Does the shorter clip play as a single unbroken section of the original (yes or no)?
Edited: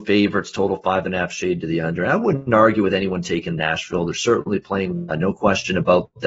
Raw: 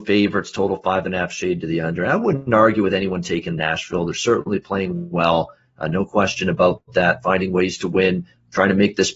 no